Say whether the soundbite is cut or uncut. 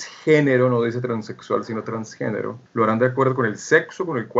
cut